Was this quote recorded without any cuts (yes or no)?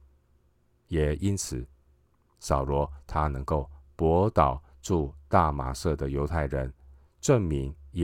yes